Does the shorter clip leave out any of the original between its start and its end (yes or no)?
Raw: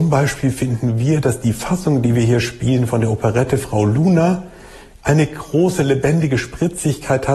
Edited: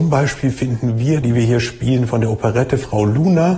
yes